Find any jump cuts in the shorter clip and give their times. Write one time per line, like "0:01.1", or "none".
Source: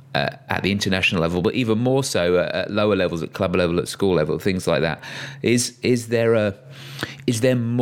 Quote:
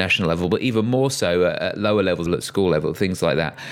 0:02.3